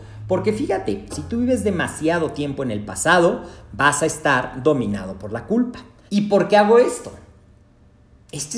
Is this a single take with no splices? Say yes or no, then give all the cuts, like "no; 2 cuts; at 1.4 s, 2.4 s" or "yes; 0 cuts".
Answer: no; 2 cuts; at 1.1 s, 6.1 s